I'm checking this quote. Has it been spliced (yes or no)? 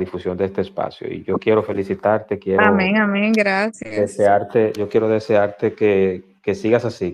no